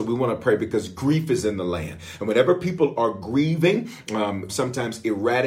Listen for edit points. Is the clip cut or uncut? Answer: cut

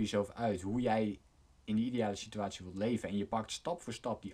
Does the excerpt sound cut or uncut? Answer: uncut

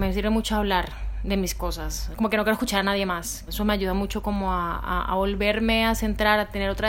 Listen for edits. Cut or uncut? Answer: cut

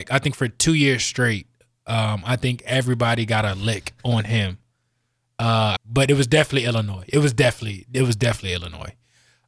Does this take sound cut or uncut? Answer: cut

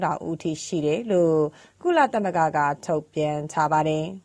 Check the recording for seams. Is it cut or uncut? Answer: uncut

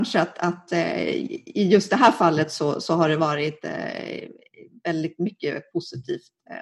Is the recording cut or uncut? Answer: uncut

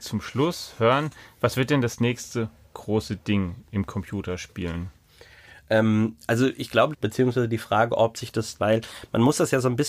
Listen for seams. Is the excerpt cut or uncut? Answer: cut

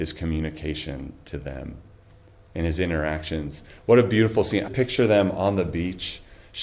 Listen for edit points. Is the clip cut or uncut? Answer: cut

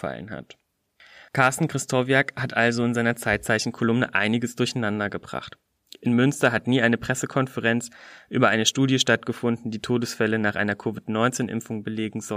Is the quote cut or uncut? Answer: cut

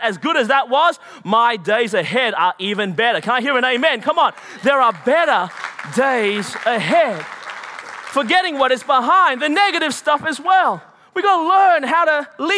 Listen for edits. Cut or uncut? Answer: uncut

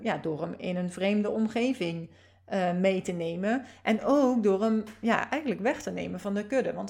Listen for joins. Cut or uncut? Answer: uncut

